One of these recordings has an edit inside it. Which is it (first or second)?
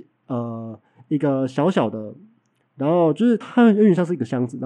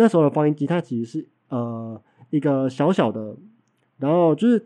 first